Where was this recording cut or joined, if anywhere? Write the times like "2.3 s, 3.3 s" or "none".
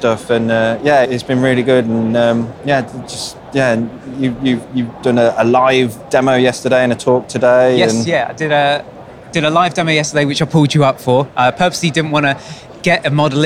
1.0 s